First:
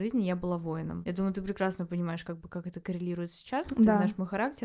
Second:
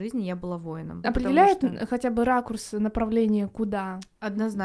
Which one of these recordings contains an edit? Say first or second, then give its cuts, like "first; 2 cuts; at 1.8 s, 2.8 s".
second; 1 cut; at 1.0 s